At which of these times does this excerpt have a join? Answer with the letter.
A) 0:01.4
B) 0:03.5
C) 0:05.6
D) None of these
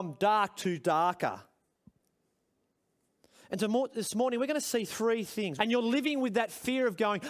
C